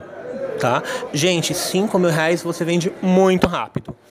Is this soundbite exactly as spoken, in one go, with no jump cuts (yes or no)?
no